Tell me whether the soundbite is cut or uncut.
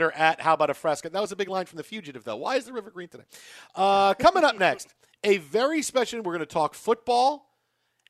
uncut